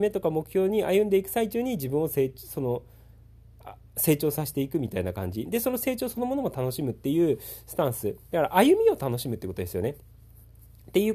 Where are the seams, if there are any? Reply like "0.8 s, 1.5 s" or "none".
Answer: none